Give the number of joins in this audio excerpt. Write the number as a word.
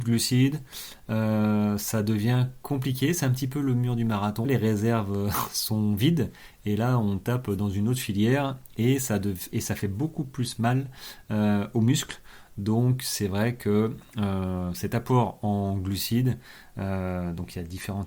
one